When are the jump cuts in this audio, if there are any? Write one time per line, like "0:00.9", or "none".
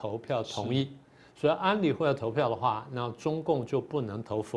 none

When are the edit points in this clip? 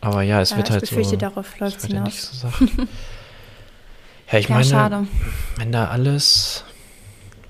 none

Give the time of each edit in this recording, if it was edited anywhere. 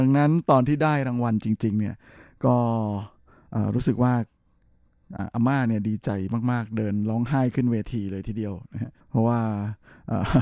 0:09.0

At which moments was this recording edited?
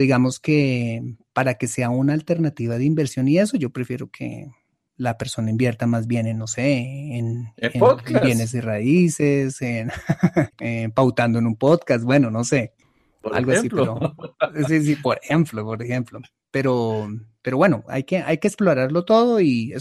none

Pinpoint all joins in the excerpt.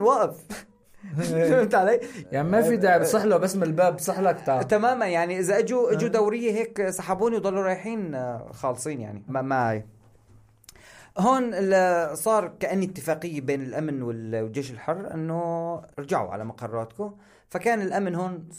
0:02.2
0:09.3
0:15.9

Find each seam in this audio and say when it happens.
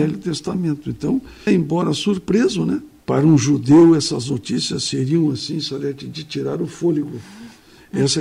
0:01.5
0:03.0

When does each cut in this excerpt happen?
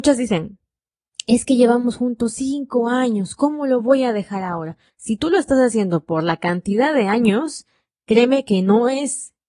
0:04.9

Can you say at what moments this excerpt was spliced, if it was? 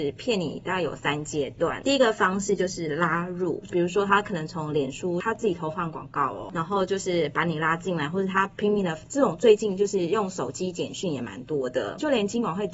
none

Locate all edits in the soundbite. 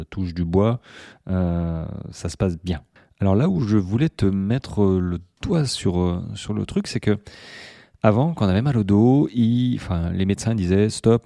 none

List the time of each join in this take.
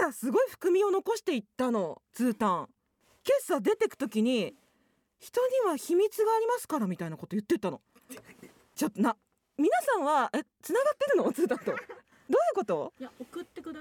none

